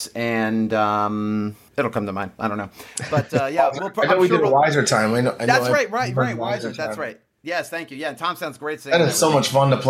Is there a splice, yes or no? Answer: no